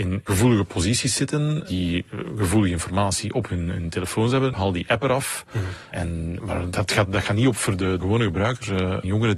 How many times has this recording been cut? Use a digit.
1